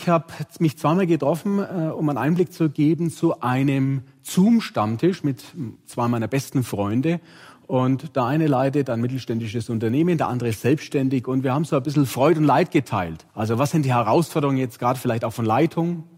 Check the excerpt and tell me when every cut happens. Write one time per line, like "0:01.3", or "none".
0:13.3